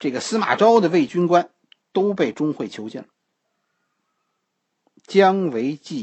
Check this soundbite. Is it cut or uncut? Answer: cut